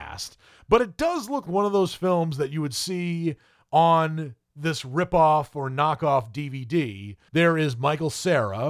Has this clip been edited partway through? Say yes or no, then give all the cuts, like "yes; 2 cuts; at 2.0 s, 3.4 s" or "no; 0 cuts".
yes; 2 cuts; at 1.5 s, 7.3 s